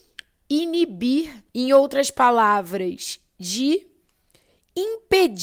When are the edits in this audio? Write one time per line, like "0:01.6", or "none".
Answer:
0:01.5